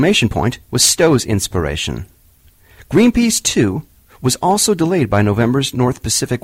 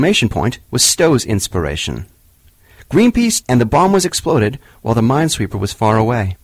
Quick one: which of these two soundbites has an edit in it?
second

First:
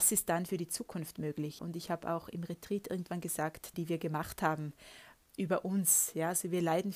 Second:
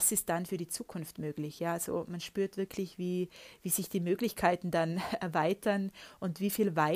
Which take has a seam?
first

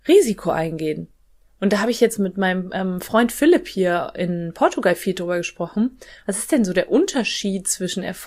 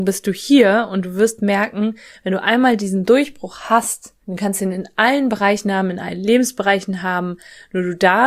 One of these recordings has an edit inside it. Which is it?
second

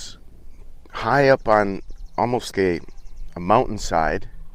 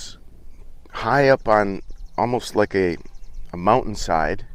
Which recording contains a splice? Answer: first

